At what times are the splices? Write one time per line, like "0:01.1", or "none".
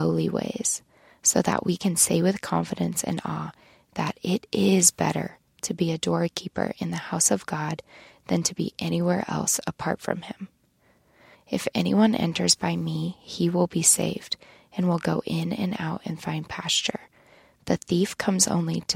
0:11.3

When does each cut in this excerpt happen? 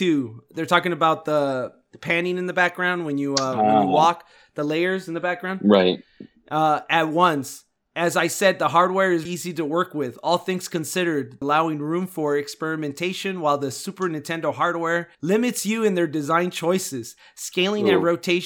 0:09.3
0:11.4
0:15.1

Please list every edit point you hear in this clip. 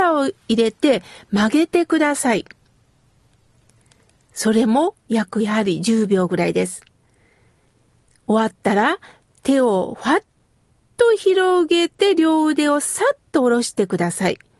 none

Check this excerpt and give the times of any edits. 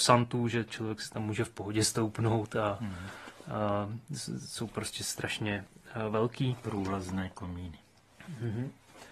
none

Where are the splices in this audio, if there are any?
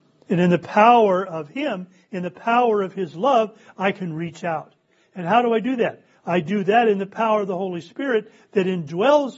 none

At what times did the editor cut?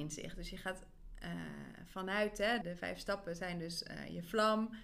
0:02.6

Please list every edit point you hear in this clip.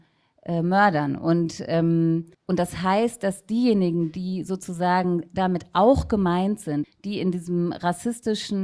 0:02.3
0:06.8

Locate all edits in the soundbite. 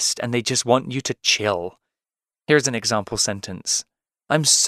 none

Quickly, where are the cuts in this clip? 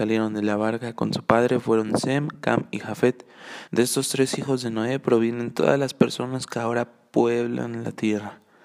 0:03.7

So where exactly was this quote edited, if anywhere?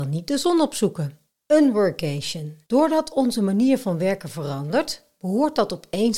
0:01.4
0:02.7

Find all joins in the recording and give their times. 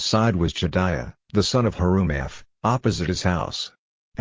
none

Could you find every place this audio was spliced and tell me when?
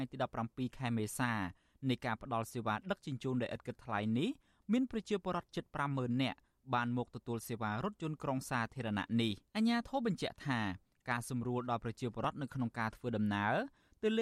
0:09.5

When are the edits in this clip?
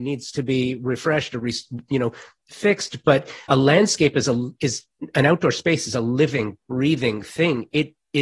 0:01.8
0:03.5

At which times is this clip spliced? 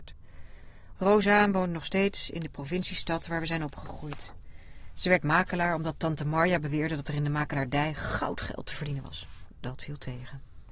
0:01.0

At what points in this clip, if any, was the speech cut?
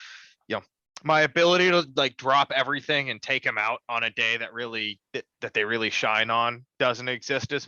none

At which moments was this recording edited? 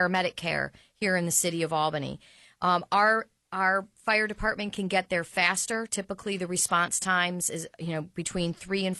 none

